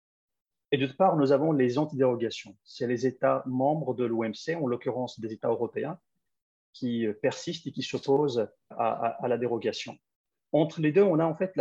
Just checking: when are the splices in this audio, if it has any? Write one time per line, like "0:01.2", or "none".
0:08.7